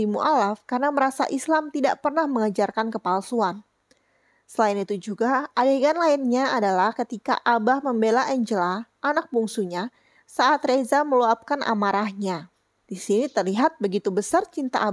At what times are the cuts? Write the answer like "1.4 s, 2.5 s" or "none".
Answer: 12.8 s

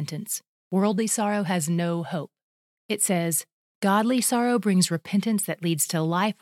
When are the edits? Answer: 2.7 s

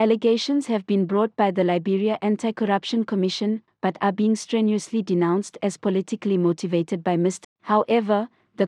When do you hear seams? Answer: 3.7 s, 7.4 s

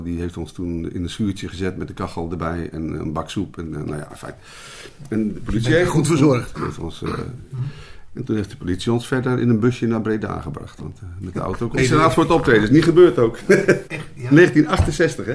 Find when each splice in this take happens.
6.5 s, 11.8 s, 13.9 s

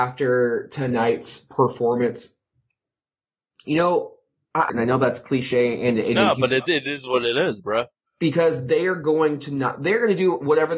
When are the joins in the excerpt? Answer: 4.7 s

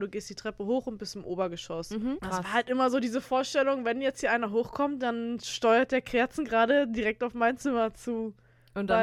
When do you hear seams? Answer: 2.2 s

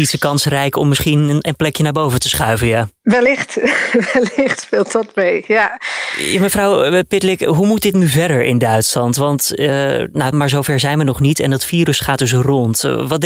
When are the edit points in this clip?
10.3 s

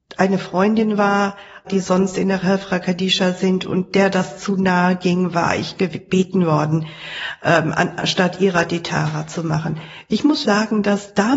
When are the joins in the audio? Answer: 1.7 s, 10.4 s

